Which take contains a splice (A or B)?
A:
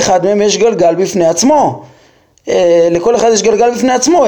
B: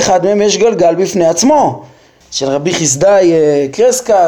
B